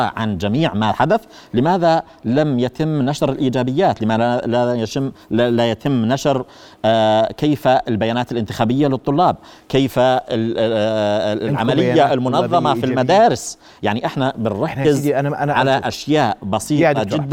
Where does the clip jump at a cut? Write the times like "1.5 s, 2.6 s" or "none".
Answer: none